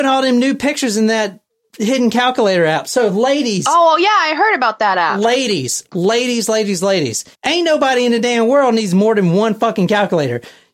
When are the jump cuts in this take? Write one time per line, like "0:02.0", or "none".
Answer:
0:07.3